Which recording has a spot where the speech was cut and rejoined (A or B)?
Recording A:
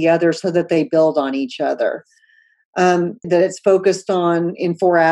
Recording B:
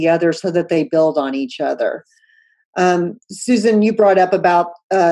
A